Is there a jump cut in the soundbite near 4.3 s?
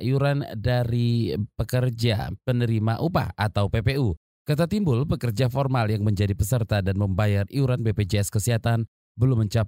no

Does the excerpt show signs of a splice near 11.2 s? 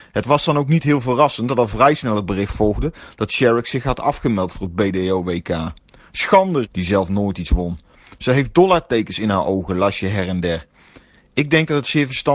no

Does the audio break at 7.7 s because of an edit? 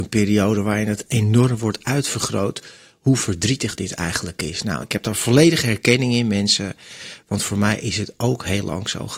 no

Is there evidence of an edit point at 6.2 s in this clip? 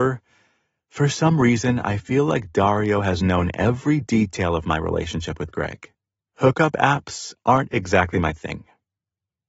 yes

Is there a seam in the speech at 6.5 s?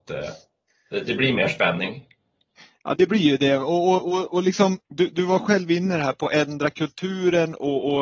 no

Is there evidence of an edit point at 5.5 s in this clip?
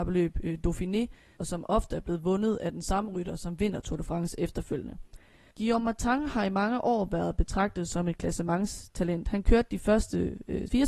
no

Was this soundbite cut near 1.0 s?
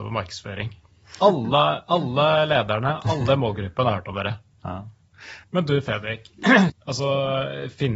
no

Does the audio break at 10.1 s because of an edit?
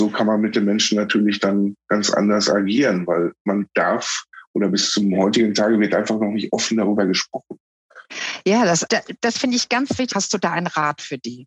yes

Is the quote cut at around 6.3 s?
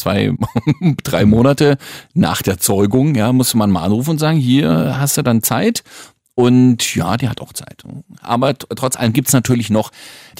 no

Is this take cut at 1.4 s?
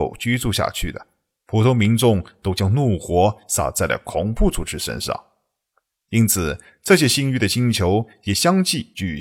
yes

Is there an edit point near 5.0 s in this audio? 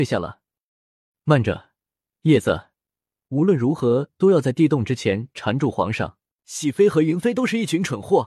no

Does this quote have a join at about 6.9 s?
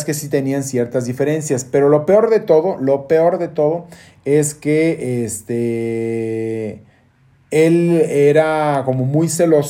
no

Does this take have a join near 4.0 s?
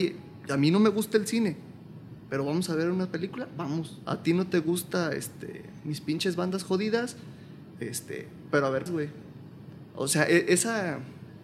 yes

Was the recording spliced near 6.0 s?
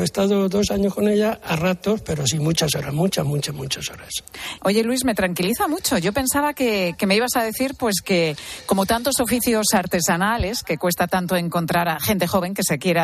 no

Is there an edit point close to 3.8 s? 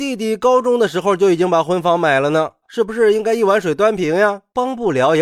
no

